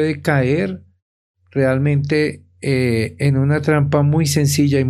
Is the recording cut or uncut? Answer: uncut